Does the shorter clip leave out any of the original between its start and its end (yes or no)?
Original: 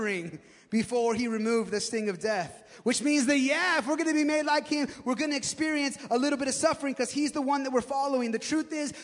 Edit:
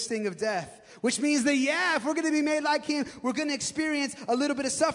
no